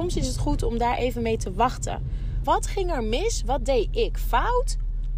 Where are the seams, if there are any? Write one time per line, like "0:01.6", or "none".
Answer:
0:02.4